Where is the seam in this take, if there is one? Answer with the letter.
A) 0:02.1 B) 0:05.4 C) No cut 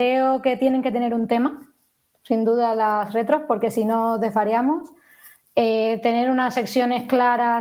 C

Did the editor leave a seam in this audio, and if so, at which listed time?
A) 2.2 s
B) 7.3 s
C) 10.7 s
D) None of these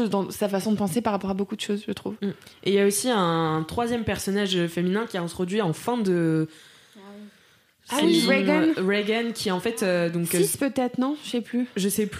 D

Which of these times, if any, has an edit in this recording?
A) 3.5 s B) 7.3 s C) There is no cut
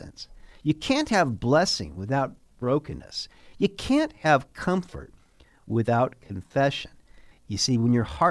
B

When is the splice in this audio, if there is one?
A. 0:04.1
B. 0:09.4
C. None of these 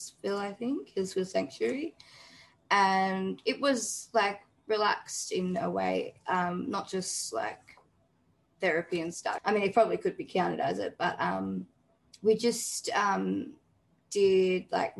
B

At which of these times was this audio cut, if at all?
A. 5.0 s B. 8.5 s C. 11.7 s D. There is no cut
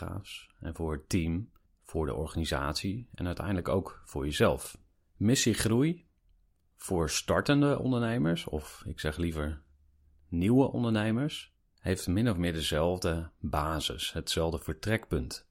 D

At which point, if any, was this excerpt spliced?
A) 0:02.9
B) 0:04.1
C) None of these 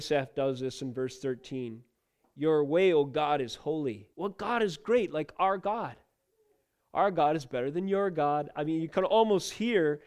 B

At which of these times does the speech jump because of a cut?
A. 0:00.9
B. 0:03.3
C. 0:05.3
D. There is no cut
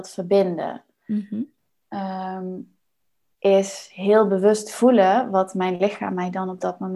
B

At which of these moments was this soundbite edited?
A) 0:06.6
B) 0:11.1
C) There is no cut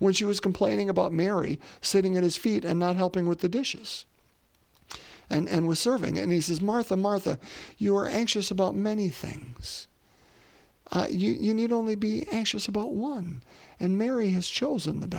C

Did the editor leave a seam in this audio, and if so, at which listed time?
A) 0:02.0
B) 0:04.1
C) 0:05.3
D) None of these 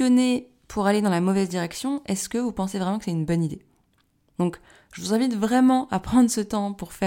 D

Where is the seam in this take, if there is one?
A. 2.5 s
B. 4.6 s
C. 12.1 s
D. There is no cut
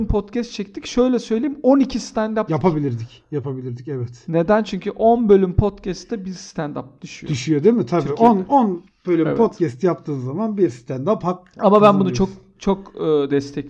A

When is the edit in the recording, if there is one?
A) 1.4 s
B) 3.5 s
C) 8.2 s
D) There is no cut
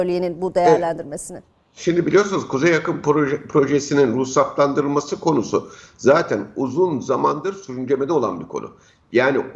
D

